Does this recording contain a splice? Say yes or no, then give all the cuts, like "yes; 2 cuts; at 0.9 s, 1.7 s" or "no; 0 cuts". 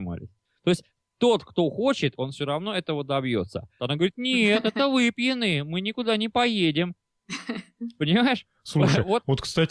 yes; 1 cut; at 3.8 s